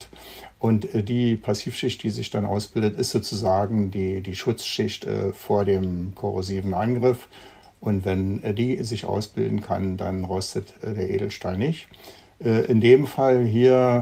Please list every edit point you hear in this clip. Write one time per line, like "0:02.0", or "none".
none